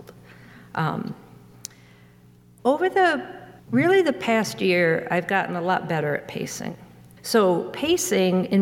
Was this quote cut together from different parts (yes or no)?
yes